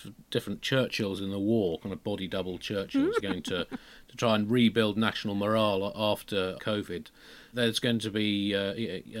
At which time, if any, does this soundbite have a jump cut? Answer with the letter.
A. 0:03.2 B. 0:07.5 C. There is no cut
A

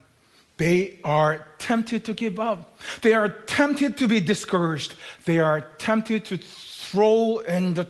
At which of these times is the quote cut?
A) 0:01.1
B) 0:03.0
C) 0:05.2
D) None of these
D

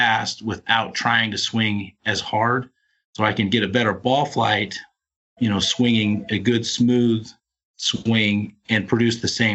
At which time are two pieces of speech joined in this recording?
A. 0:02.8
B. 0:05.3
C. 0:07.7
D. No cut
D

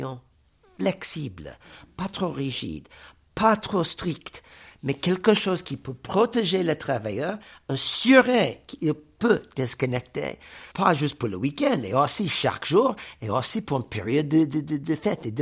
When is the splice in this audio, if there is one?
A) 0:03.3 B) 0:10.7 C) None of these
B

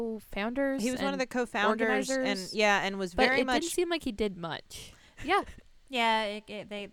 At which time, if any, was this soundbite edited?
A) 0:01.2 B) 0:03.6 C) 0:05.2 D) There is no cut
C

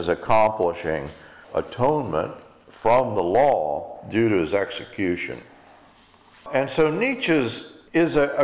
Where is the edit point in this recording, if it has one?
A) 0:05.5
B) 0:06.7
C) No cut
C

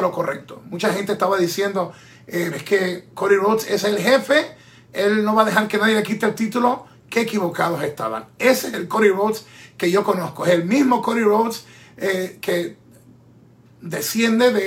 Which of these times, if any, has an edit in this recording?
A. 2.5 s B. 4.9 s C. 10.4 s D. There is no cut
A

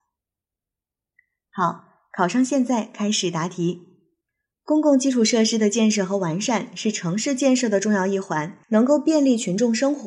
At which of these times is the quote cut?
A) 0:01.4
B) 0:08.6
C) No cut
B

